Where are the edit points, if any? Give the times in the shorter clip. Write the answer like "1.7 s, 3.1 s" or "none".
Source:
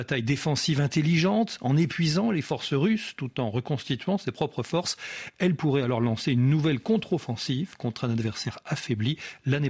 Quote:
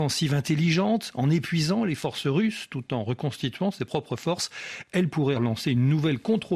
5.4 s